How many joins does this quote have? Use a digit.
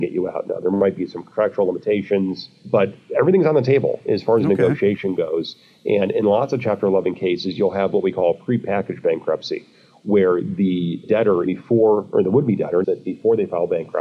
2